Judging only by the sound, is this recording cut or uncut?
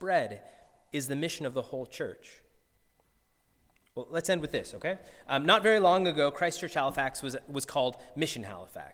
uncut